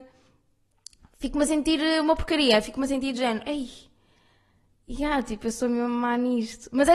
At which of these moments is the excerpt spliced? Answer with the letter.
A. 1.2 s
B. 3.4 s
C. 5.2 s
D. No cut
D